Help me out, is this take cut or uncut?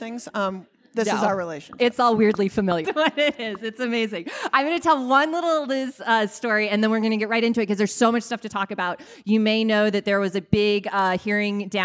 cut